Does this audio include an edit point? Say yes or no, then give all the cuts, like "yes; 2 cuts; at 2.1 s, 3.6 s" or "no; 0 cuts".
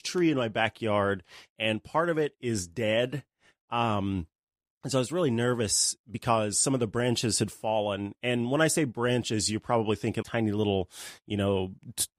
yes; 1 cut; at 10.2 s